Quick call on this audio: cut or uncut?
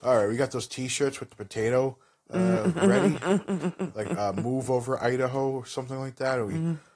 uncut